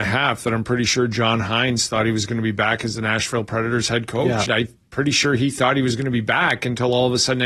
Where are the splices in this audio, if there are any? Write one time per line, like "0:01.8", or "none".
0:04.5